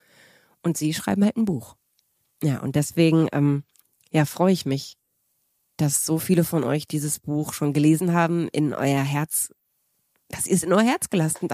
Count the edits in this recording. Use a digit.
0